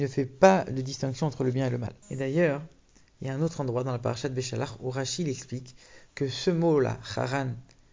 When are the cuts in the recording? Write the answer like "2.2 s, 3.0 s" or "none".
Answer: 2.0 s